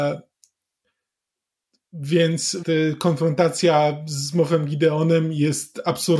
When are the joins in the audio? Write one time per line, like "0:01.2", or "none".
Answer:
0:02.6